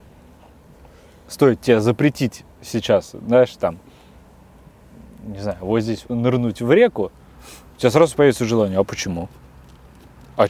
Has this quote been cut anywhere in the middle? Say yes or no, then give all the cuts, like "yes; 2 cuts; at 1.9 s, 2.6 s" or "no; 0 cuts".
yes; 1 cut; at 6.0 s